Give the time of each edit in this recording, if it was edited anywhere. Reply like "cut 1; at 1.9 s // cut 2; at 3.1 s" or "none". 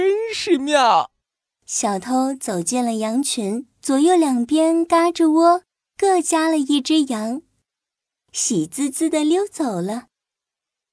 cut 1; at 3.7 s // cut 2; at 8.2 s

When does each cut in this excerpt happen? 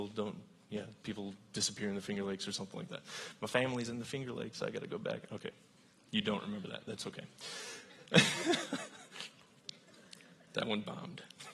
none

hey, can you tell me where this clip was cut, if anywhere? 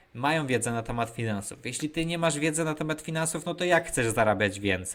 none

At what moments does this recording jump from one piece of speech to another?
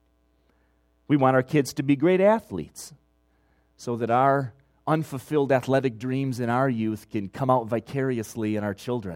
none

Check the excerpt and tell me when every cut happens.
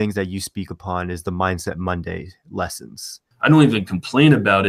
cut 1; at 3.3 s

